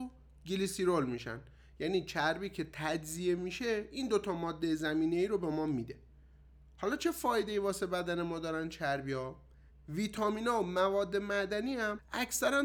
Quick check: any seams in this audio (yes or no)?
yes